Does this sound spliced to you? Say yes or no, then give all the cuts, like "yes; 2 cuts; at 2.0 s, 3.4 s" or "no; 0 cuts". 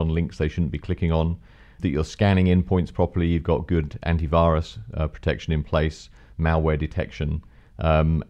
no; 0 cuts